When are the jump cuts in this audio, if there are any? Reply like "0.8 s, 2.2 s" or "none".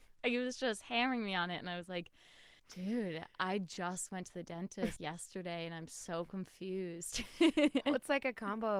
2.6 s, 5.0 s